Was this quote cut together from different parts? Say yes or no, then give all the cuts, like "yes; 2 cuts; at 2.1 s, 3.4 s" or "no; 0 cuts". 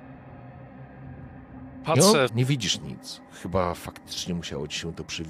yes; 1 cut; at 2.3 s